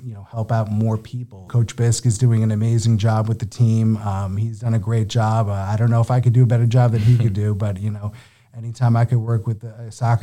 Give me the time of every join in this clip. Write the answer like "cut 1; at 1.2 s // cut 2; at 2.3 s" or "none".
cut 1; at 1.5 s